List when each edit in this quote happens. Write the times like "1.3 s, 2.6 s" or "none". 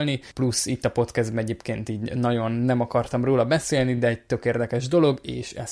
none